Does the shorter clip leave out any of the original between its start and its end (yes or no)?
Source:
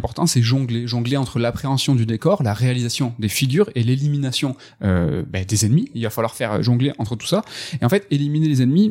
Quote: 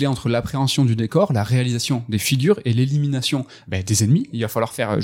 yes